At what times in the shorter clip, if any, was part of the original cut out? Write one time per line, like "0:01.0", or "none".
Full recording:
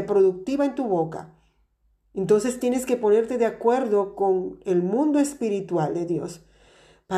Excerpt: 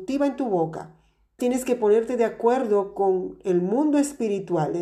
0:01.4

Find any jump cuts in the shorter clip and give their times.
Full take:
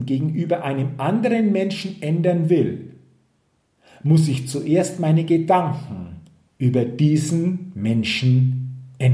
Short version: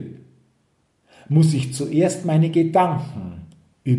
none

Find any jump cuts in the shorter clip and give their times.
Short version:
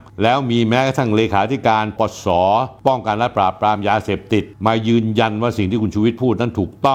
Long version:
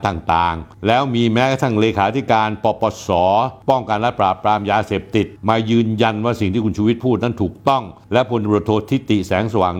0:02.0

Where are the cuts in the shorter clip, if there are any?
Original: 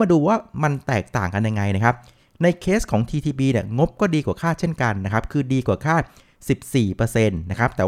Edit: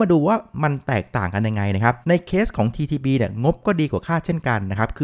0:02.0

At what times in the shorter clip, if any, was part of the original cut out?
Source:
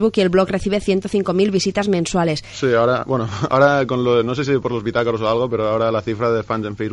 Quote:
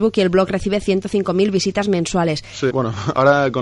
0:02.7

